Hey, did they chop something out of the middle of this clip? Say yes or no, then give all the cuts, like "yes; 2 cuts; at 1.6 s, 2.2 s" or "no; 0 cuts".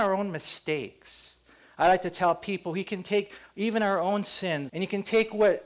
yes; 1 cut; at 4.7 s